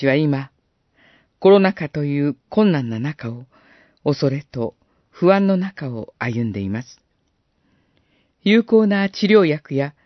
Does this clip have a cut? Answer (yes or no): no